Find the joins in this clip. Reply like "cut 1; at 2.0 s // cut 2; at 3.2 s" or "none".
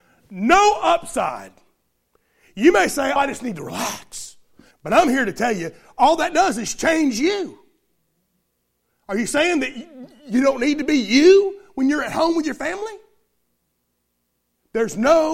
cut 1; at 3.2 s // cut 2; at 4.7 s